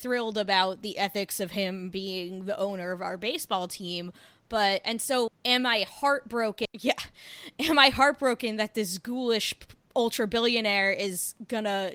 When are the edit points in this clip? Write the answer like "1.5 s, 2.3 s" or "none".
5.3 s, 6.7 s